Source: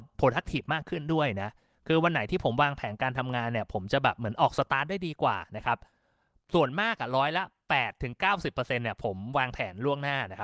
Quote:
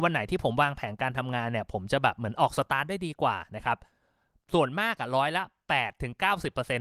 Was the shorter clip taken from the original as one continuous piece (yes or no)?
yes